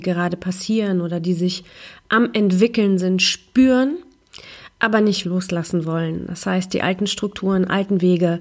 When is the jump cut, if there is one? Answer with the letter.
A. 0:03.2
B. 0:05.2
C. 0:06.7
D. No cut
B